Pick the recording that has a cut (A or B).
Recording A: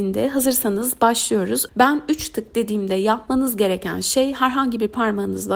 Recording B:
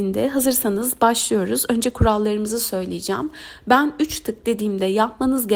A